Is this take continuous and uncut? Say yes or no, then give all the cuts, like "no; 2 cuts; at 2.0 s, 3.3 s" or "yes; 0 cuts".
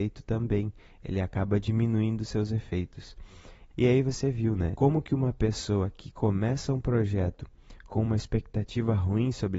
no; 2 cuts; at 3.7 s, 4.8 s